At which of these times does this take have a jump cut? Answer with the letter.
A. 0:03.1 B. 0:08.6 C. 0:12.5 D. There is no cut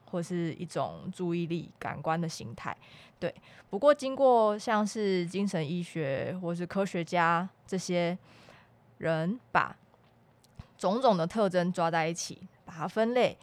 C